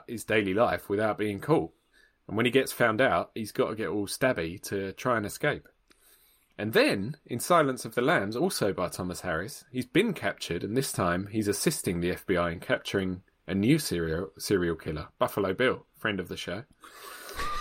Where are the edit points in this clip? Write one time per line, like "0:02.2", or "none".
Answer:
none